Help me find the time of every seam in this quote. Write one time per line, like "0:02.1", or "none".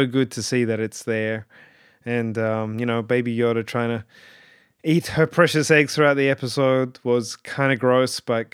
none